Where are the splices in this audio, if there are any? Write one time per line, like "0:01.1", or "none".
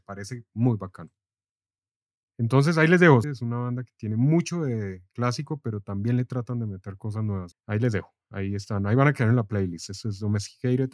0:03.2
0:07.5